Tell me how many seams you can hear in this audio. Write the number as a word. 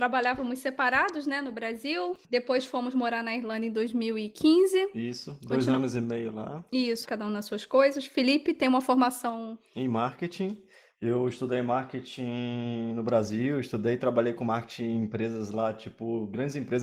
one